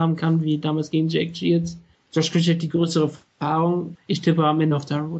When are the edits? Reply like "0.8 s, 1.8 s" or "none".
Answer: 1.9 s, 3.9 s